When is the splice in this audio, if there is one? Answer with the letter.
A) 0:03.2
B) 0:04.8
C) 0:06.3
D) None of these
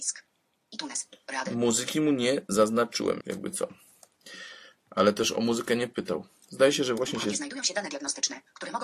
A